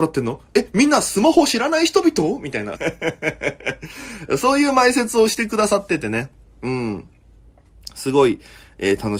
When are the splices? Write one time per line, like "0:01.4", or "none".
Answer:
0:02.7